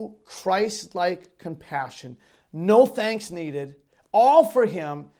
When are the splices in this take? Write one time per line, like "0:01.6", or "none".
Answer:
0:02.4

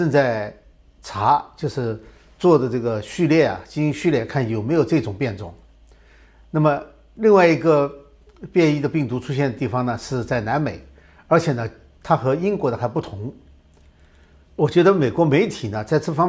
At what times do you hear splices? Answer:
0:14.4

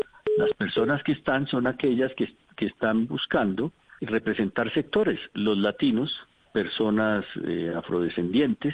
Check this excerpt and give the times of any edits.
0:04.0
0:06.4

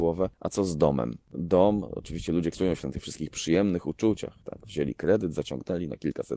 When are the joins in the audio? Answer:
0:02.5

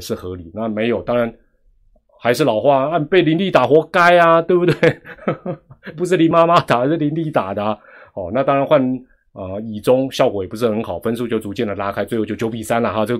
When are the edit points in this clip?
none

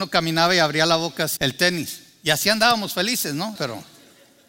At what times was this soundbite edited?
0:01.4
0:03.6

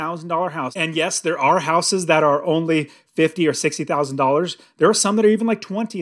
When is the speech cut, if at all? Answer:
none

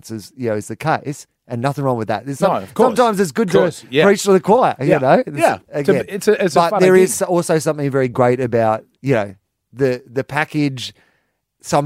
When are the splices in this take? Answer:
none

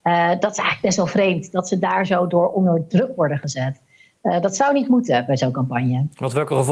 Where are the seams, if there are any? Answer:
none

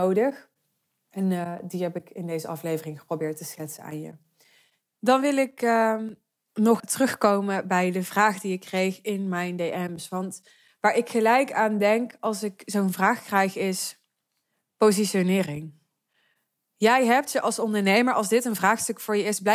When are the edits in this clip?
0:06.8

